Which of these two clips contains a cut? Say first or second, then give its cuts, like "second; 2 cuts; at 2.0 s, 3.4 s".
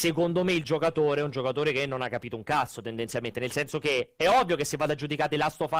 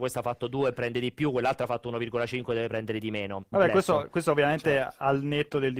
second; 1 cut; at 3.5 s